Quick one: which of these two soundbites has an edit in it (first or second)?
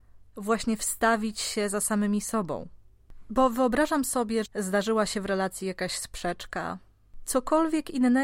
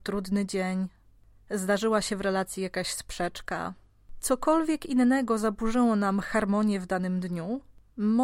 first